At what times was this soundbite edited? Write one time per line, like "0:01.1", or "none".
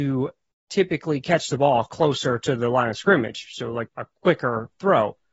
0:03.9